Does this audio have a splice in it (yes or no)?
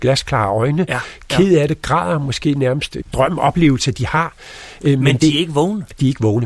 yes